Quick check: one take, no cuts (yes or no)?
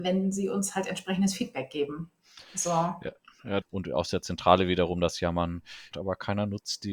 no